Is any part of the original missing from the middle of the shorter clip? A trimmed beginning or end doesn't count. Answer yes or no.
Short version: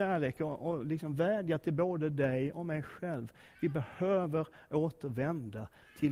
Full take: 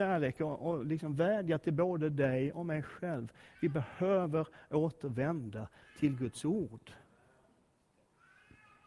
no